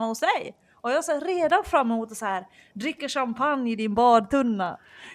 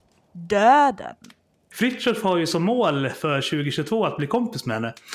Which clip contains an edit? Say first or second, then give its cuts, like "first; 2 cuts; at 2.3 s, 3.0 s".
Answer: second; 1 cut; at 1.7 s